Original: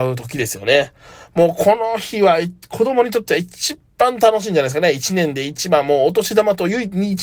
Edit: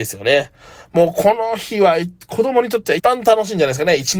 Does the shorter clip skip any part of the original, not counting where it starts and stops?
yes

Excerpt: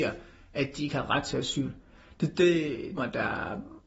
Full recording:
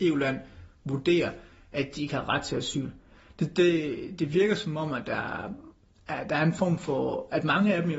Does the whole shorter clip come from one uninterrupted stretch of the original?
no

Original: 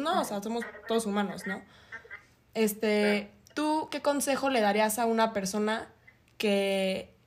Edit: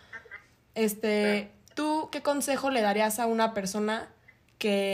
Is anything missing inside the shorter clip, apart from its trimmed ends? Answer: no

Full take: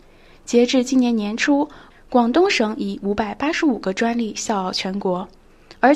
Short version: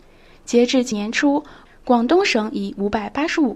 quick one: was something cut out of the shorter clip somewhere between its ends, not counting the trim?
yes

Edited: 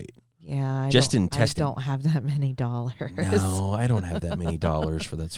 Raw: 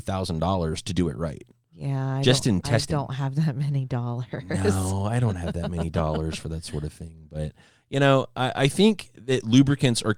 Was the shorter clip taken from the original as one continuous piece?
yes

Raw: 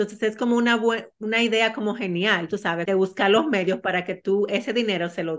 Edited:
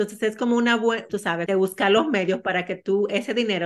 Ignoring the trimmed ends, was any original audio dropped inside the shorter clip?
yes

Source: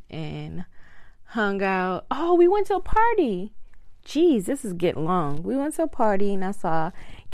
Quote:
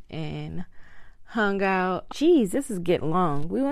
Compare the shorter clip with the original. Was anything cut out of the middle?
yes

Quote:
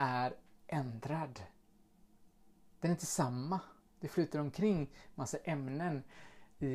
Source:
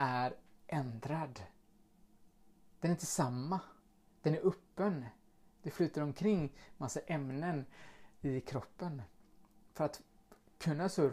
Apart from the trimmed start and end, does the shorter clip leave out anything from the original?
yes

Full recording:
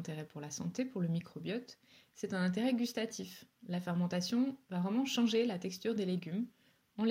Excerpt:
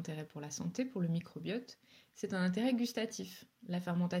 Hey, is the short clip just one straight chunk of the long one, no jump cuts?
yes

